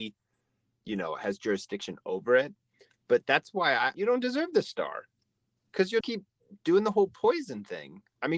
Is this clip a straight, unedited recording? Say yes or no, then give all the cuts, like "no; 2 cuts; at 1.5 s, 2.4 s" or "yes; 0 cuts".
no; 2 cuts; at 3.9 s, 6.0 s